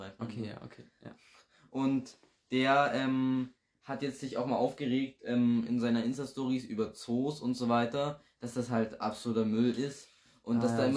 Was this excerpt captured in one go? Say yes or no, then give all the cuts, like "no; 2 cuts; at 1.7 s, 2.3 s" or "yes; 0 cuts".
yes; 0 cuts